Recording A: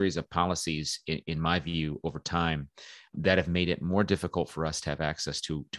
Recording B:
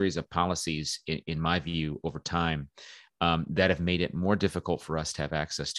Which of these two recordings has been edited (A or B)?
A